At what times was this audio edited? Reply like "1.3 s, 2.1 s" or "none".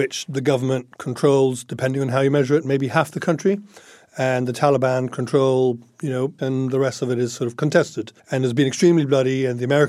6.4 s, 8.2 s